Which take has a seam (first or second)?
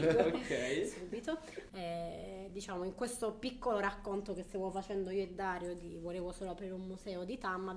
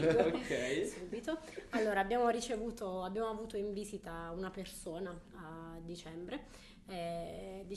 first